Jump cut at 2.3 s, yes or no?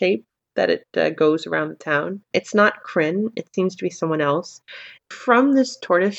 yes